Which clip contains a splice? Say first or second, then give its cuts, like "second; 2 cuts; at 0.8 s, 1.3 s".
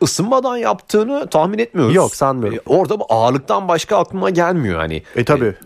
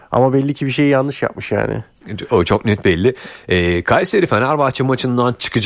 first; 1 cut; at 2.7 s